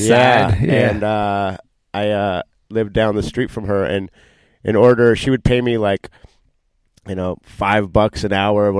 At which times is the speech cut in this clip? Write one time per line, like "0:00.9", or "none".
none